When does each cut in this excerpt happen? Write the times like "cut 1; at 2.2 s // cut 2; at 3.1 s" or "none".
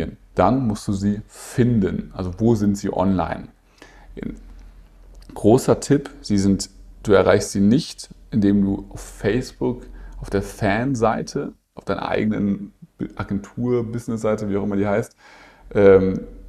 none